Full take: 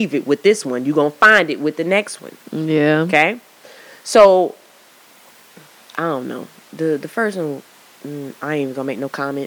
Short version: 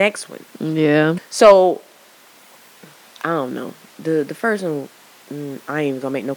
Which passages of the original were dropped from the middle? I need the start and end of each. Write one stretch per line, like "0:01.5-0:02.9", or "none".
0:03.1-0:03.9